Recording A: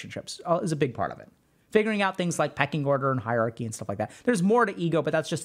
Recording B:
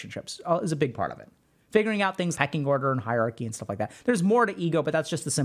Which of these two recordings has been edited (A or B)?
B